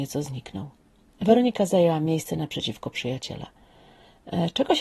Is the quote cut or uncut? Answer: uncut